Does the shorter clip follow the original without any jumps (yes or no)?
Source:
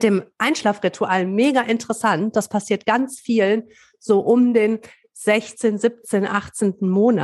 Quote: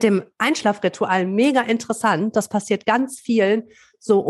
yes